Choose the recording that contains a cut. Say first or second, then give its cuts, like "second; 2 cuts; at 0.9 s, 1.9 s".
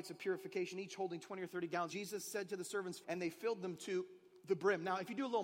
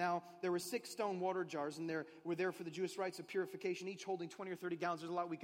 first; 2 cuts; at 1.9 s, 3.0 s